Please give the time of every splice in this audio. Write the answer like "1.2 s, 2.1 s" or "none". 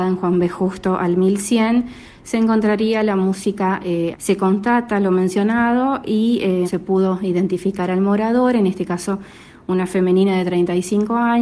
4.1 s, 6.6 s